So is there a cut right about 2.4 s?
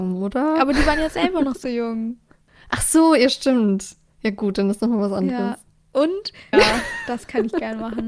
no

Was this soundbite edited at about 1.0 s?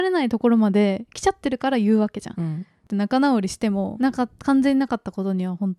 no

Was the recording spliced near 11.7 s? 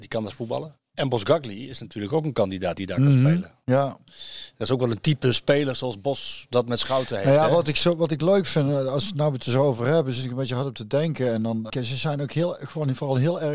yes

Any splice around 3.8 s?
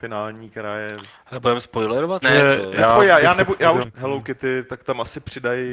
yes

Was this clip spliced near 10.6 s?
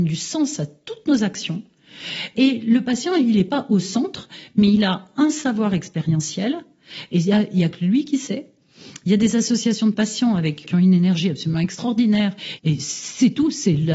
yes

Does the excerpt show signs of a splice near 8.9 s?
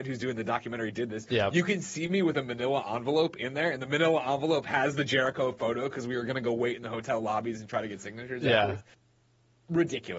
no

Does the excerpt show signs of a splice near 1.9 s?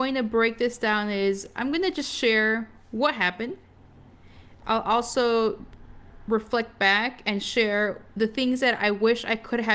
no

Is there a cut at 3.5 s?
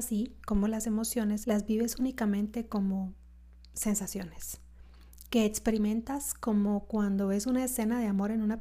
no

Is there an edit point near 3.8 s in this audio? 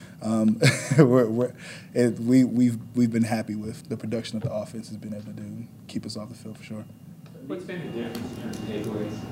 yes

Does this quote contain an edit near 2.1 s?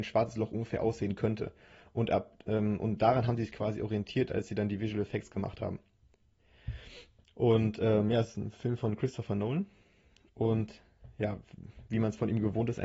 no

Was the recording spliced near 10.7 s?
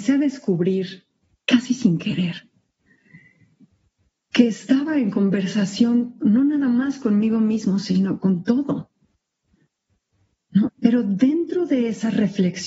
yes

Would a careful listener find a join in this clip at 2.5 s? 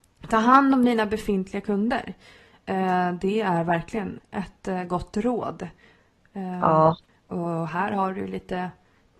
no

